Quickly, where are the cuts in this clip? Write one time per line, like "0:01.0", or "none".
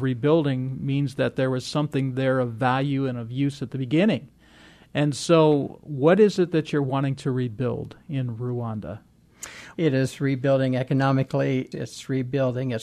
0:09.7
0:11.7